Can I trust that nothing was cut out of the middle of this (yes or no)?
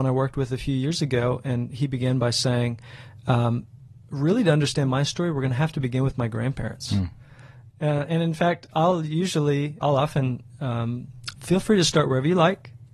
no